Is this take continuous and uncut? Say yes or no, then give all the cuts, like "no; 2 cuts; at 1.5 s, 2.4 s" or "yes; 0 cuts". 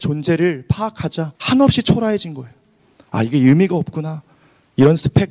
no; 1 cut; at 1.4 s